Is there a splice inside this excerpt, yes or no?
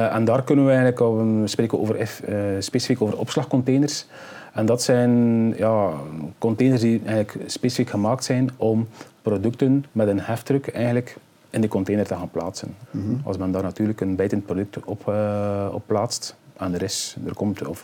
yes